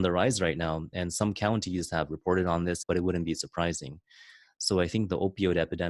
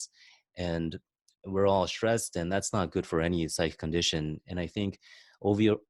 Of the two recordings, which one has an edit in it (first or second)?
first